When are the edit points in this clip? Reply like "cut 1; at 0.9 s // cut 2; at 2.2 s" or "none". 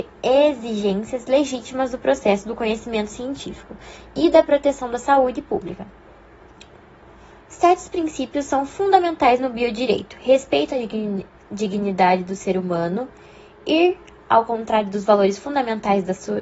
none